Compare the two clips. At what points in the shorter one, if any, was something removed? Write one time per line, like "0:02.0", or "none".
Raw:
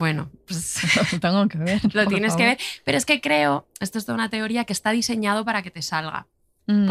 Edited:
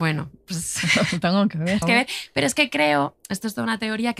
0:01.8